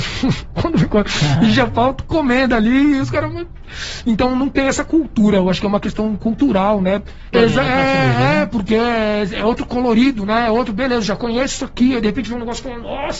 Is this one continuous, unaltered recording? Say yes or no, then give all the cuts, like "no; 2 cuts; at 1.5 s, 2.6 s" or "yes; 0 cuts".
no; 1 cut; at 7.3 s